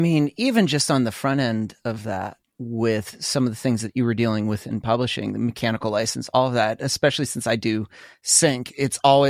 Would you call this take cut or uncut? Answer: uncut